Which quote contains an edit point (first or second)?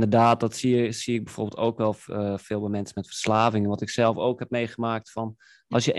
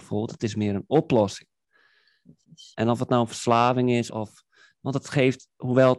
second